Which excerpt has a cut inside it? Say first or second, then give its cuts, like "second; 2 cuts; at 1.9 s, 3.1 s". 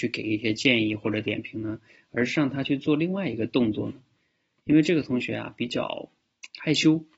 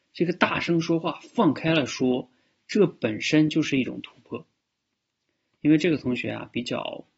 second; 1 cut; at 5.5 s